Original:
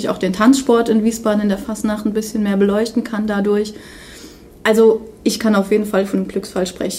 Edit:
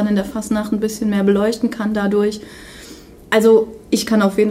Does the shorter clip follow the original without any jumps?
yes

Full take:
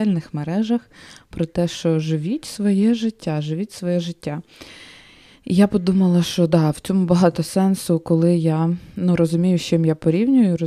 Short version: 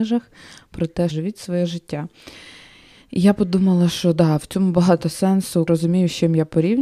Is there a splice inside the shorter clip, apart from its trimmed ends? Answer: yes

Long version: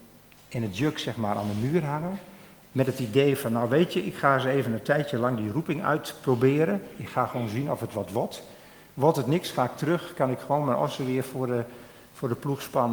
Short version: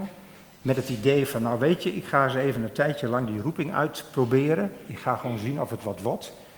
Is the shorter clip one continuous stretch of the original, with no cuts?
yes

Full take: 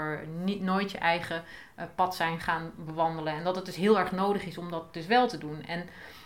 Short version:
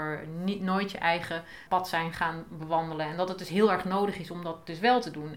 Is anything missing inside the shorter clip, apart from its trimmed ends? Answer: yes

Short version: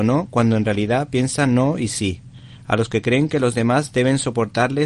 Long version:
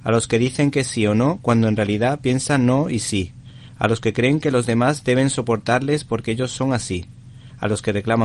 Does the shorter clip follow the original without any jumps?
yes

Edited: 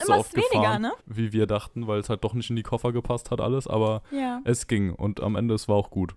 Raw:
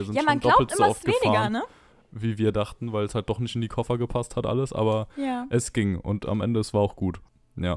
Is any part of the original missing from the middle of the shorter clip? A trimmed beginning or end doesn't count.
yes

